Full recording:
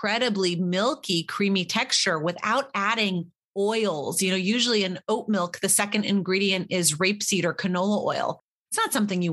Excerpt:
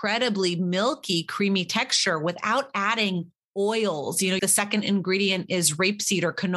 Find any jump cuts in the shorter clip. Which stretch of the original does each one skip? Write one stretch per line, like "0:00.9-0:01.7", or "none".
0:04.4-0:05.6